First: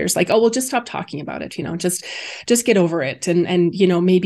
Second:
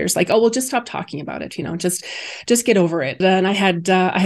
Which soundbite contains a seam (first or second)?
second